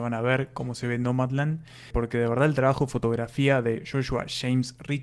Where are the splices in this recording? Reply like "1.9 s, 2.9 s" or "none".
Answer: 1.9 s